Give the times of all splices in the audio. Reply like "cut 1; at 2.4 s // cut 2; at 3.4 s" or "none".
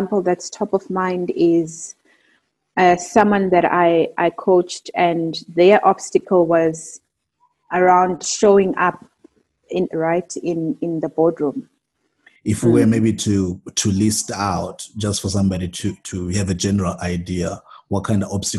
cut 1; at 9.9 s // cut 2; at 12.4 s